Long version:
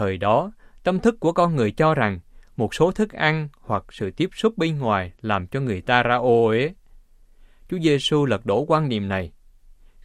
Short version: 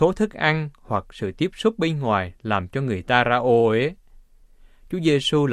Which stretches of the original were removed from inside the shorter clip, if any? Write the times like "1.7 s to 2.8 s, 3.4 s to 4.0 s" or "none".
none